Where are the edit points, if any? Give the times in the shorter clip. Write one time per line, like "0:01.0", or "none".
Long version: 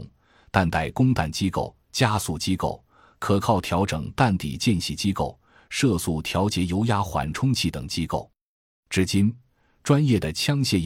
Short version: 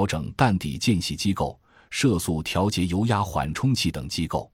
none